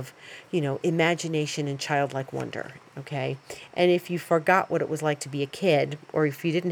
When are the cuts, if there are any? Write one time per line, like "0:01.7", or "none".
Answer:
0:02.8